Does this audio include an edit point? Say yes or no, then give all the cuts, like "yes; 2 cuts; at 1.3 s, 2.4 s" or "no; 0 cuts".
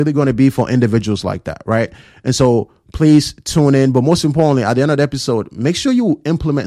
no; 0 cuts